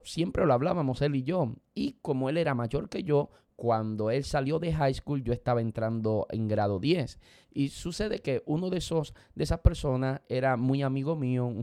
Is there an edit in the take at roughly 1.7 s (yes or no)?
no